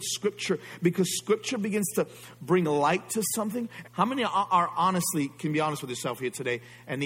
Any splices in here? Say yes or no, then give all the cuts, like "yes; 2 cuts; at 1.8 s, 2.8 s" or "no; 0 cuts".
yes; 1 cut; at 3.8 s